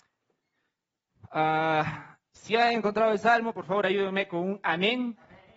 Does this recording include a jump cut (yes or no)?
no